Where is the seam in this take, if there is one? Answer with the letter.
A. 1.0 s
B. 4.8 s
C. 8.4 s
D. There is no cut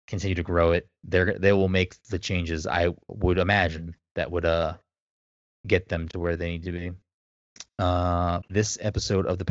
C